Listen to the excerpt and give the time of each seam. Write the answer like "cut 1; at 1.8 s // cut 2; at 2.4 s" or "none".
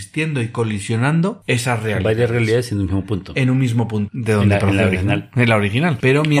cut 1; at 4.1 s